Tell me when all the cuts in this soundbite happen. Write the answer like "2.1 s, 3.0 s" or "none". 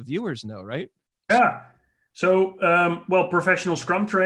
1.3 s